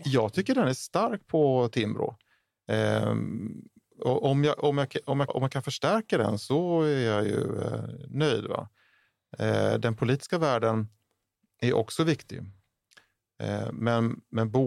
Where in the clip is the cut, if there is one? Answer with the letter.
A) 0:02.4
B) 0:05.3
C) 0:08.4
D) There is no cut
B